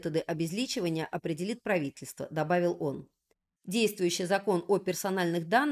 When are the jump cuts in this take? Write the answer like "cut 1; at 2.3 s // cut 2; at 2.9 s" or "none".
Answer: none